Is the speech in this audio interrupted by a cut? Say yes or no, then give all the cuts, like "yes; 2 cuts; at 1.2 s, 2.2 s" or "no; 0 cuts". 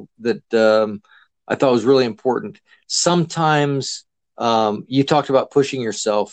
no; 0 cuts